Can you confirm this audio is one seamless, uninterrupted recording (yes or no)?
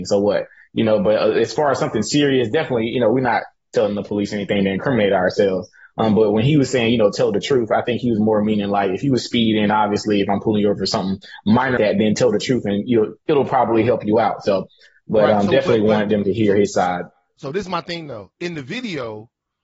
no